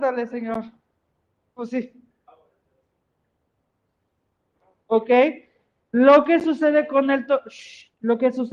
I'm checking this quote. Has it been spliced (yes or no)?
yes